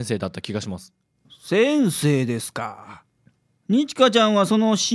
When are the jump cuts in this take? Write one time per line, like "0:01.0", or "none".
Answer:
0:01.2